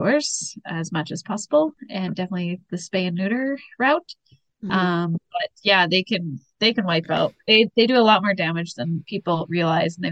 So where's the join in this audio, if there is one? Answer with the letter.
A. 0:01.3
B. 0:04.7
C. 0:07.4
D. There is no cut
D